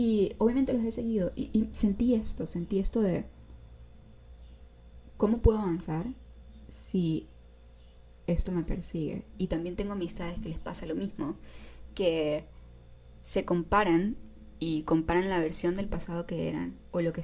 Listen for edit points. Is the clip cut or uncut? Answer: cut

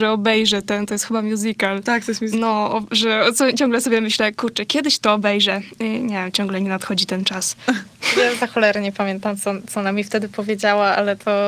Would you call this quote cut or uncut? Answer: uncut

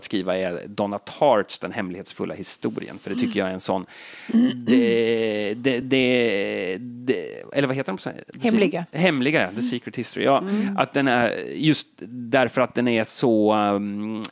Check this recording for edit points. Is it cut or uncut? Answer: uncut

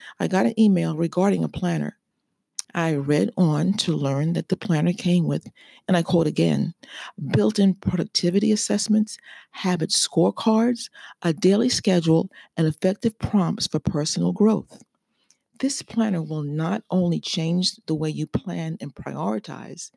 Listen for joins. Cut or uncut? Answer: cut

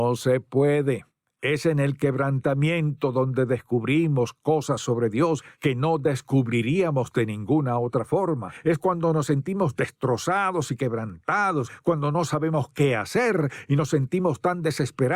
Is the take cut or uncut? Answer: uncut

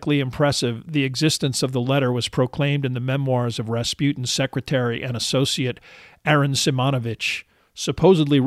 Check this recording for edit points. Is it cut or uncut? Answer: uncut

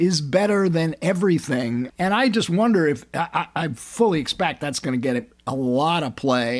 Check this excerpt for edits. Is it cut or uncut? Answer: uncut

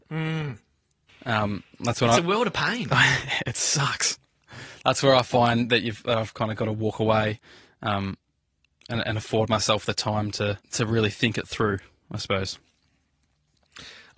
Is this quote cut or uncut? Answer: cut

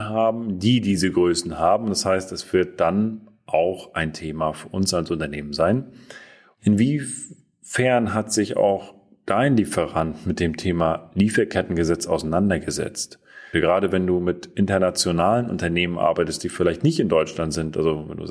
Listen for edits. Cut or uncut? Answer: cut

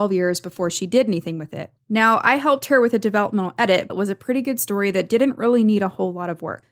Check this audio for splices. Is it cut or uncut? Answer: cut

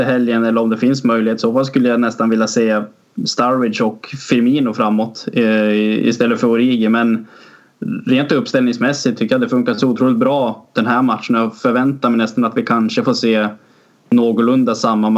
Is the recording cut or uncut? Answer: uncut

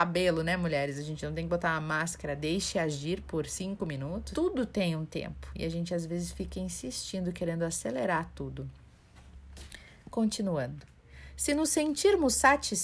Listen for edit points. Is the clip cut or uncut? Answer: cut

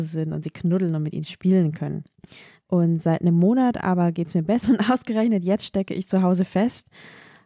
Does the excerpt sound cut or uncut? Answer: cut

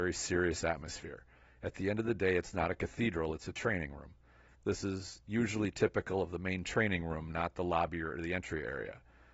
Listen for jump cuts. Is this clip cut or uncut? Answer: cut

